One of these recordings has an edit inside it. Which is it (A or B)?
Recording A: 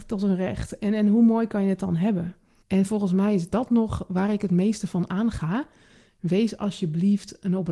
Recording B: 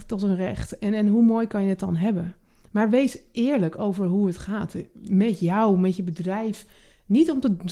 A